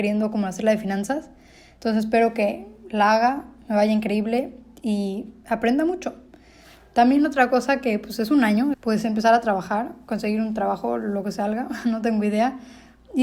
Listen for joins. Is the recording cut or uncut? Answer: cut